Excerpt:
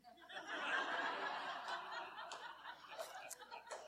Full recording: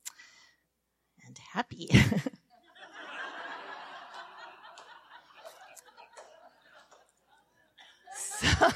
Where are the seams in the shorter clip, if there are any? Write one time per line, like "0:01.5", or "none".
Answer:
none